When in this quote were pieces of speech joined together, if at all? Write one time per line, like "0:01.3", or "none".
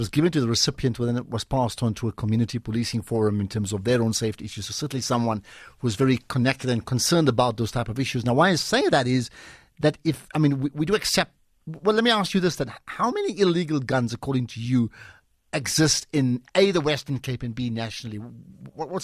none